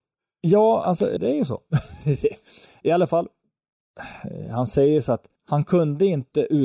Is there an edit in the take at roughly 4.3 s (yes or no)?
no